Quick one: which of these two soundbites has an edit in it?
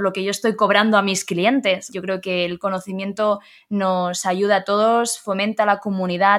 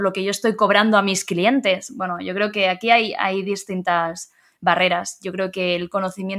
first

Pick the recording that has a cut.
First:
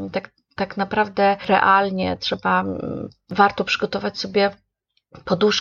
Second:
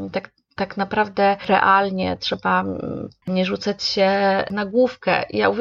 second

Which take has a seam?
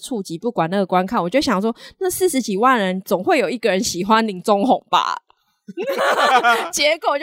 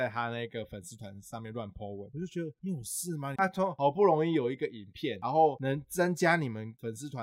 second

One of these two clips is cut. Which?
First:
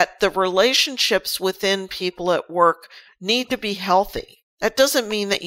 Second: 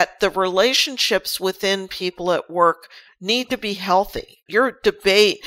second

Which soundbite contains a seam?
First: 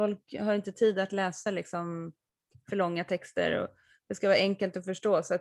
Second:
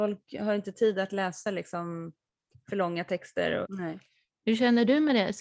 second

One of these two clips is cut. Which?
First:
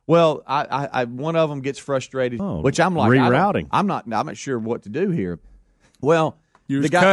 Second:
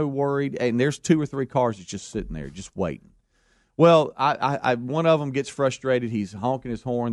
first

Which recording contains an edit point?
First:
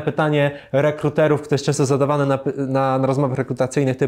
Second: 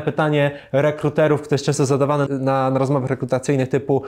second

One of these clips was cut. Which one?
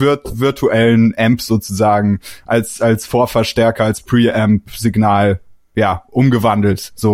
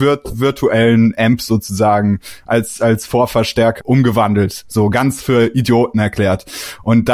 second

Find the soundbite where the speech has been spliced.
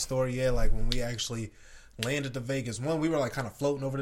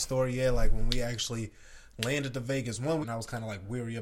second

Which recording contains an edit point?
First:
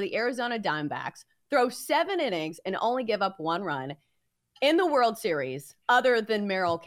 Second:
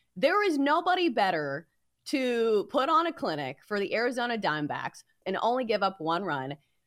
second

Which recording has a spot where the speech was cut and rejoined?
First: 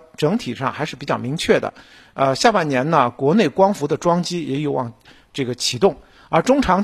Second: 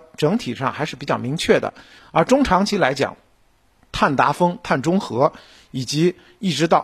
second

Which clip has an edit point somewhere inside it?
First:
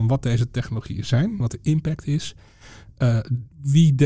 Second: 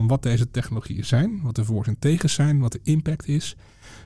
first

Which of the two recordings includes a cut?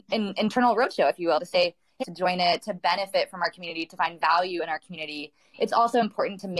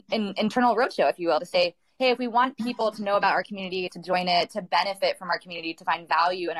first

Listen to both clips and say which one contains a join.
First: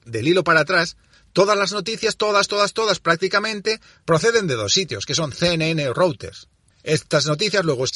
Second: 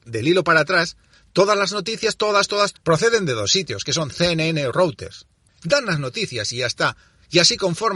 second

